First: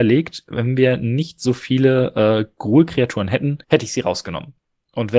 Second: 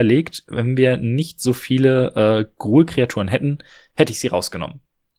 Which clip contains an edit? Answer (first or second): first